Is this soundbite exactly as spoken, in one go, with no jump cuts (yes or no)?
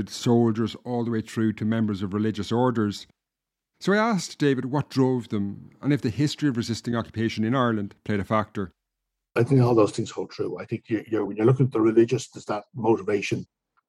yes